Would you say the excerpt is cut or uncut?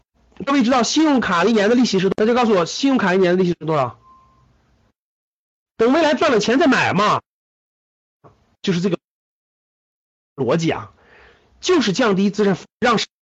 cut